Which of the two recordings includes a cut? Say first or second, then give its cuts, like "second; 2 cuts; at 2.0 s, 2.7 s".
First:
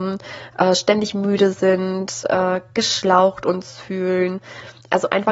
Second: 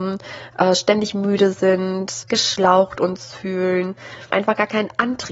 second; 2 cuts; at 2.2 s, 4.3 s